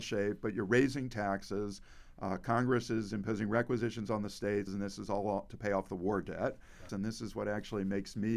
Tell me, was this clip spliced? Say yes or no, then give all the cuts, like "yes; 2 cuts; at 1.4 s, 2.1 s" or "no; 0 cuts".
yes; 2 cuts; at 4.7 s, 6.9 s